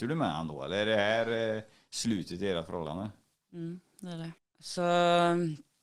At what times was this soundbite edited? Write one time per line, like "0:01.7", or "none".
0:04.4